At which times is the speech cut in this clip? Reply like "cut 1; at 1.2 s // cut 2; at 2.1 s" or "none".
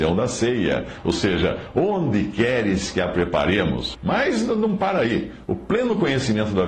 cut 1; at 3.9 s